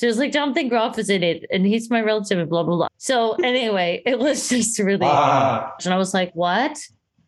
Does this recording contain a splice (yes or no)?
yes